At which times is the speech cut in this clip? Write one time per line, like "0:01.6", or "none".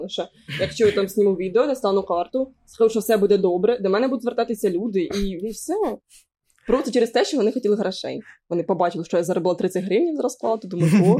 none